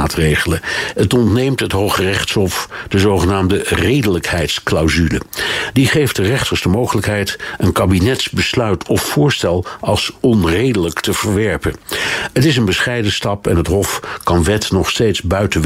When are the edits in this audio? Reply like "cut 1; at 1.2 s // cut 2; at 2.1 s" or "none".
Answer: none